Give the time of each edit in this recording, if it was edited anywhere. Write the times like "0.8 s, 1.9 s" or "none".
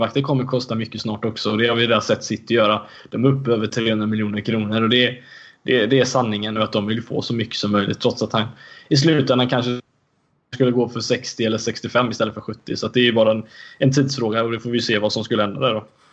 6.6 s